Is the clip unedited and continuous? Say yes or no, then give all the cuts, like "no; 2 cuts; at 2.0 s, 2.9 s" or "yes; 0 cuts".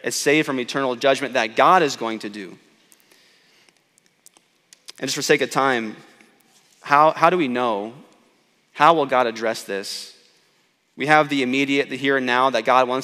yes; 0 cuts